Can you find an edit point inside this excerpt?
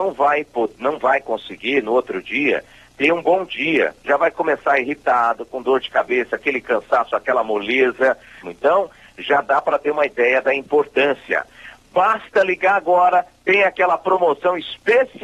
yes; 1 cut; at 8.4 s

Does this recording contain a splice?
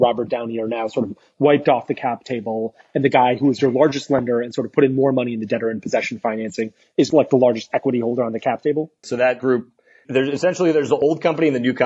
yes; 1 cut; at 9.0 s

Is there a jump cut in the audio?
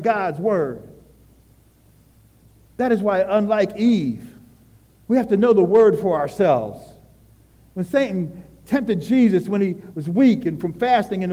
no; 0 cuts

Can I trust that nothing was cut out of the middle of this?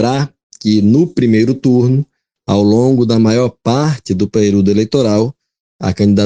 yes; 0 cuts

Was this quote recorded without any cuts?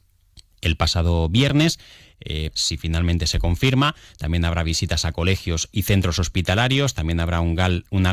no; 1 cut; at 2.5 s

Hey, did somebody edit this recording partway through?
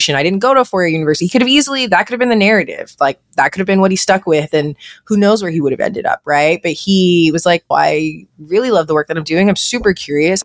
yes; 1 cut; at 7.7 s

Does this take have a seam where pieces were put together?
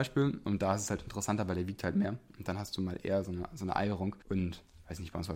yes; 1 cut; at 4.2 s

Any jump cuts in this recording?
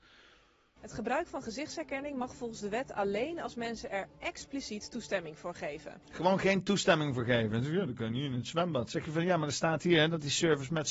no; 0 cuts

